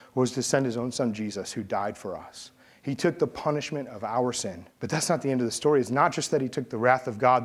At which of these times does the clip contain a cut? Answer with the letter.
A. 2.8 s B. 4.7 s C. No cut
B